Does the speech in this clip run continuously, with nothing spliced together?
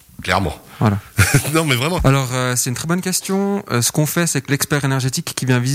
no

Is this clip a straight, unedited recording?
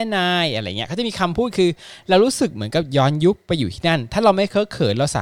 yes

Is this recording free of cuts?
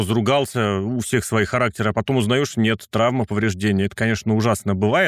yes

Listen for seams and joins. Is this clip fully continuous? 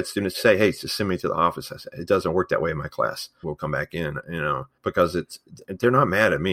no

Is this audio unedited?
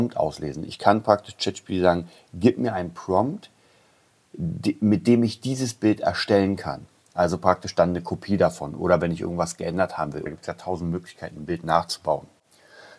no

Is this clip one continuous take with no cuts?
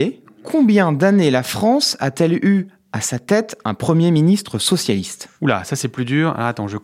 yes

